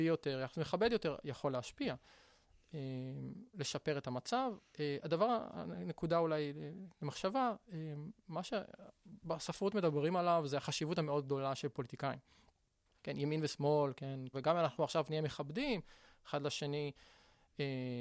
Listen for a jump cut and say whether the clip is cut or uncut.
cut